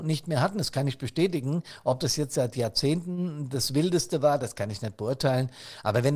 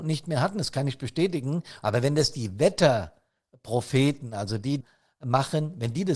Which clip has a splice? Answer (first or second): second